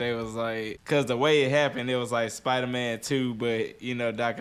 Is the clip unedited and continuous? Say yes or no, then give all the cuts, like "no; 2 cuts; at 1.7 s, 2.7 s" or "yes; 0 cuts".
yes; 0 cuts